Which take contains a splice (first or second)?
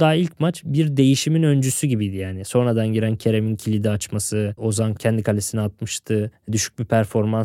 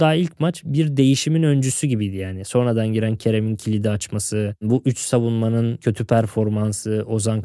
first